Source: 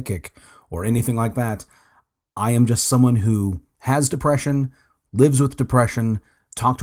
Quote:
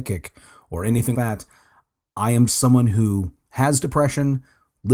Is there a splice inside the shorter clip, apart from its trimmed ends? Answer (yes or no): yes